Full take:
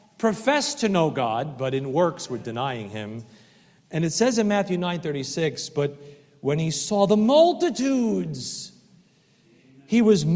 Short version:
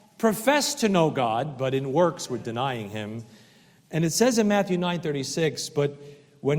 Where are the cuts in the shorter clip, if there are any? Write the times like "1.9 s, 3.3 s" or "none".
none